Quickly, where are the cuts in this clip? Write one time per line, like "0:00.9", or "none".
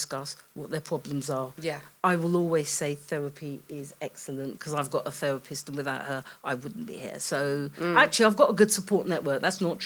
none